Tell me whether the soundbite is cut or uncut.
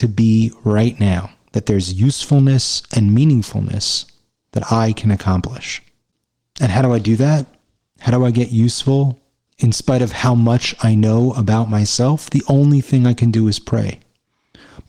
uncut